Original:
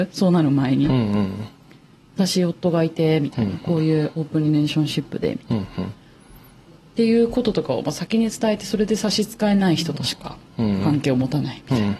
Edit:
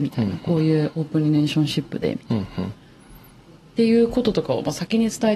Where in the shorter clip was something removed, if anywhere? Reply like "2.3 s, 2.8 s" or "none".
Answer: none